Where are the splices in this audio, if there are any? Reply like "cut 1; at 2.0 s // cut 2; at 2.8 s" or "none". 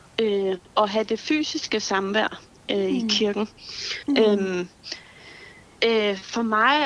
cut 1; at 4.0 s // cut 2; at 5.7 s

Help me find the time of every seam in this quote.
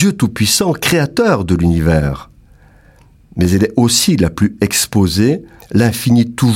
cut 1; at 5.6 s

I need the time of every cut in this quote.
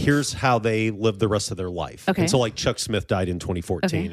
none

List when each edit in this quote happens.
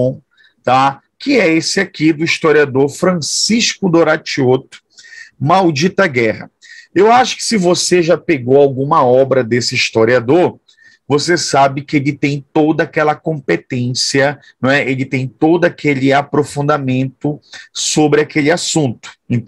none

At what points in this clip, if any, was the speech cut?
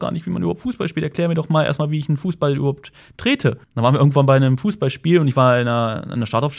cut 1; at 3.6 s

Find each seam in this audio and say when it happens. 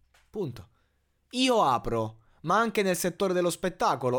none

